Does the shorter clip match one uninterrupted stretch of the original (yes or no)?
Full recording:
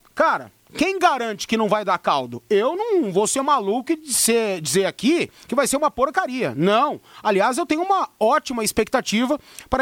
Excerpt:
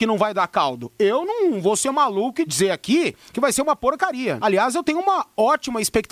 no